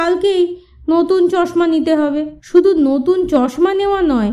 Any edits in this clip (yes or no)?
yes